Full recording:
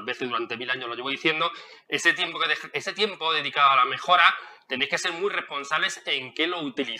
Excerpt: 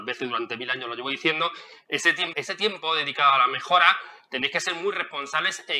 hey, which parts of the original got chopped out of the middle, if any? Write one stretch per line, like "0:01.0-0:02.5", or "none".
0:02.3-0:02.7